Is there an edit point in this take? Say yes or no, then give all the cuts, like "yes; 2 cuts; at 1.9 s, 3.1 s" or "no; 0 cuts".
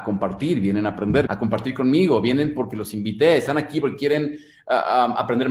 yes; 1 cut; at 1.3 s